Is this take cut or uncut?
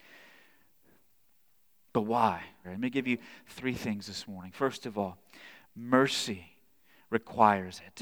cut